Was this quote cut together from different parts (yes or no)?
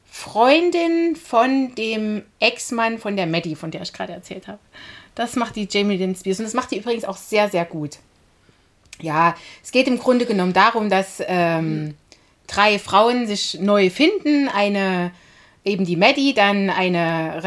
no